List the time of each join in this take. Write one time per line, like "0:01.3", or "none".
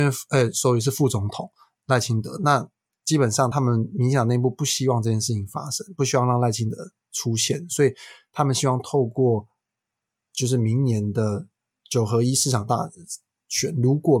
none

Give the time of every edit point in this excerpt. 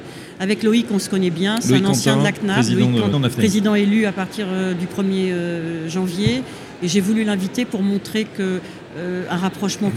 0:03.1

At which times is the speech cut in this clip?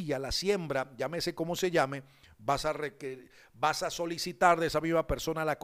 none

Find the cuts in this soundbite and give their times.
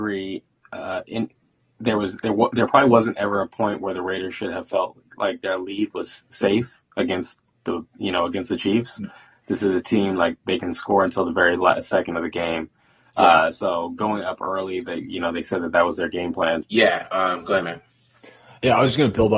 0:16.6

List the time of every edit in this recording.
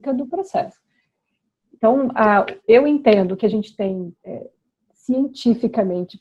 0:02.6
0:04.1

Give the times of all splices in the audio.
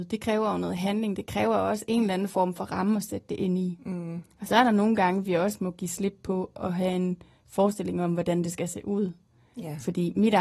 none

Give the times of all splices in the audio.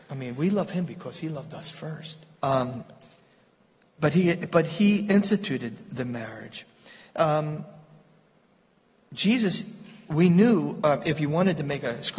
0:02.4

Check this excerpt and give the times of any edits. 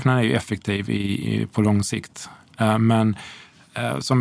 none

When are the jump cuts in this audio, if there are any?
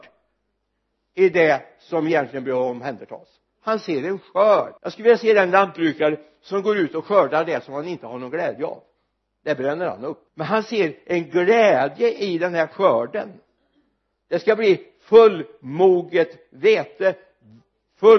0:04.8
0:10.3

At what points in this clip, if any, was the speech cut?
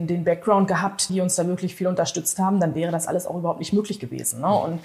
0:01.1

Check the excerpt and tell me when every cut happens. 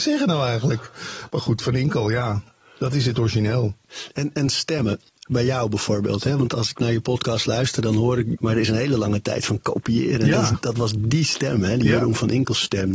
0:08.3

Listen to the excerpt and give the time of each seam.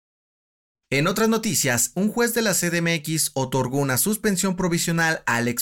0:01.9

